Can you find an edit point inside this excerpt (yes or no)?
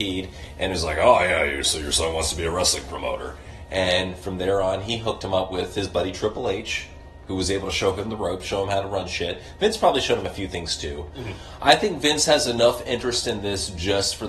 no